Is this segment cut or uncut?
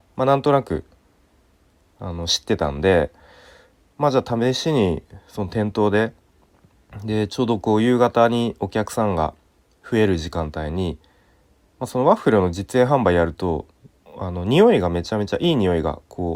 uncut